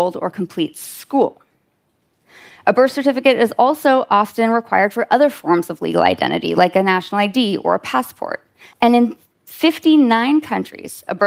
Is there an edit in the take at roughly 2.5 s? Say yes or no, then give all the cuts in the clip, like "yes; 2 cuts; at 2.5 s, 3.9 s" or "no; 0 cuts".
no; 1 cut; at 8.7 s